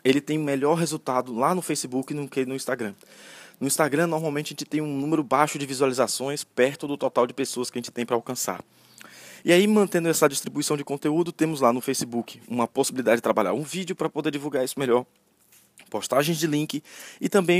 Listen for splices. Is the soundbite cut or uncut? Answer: uncut